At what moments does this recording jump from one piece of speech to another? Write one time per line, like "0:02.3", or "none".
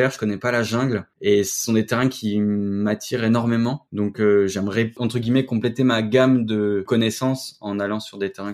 none